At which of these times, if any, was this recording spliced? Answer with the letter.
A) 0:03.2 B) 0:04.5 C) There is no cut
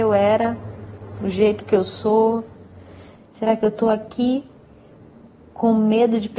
A